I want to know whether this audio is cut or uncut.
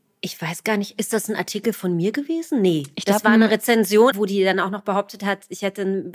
cut